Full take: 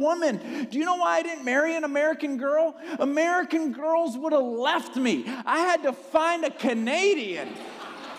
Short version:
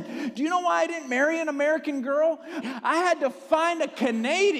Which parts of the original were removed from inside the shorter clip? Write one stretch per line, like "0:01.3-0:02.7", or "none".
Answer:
0:03.0-0:05.2